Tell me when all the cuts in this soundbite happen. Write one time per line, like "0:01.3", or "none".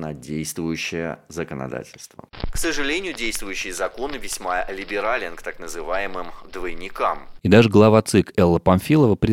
0:07.4